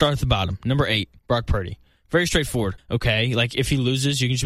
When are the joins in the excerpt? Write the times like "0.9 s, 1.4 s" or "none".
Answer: 1.2 s, 2.8 s